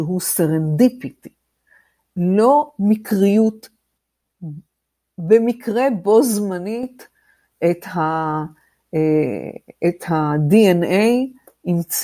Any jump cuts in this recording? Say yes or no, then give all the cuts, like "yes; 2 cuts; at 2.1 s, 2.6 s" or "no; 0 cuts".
no; 0 cuts